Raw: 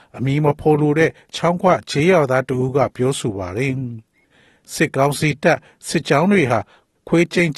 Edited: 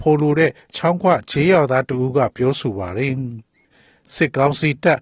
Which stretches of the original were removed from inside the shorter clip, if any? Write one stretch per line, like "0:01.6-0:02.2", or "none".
none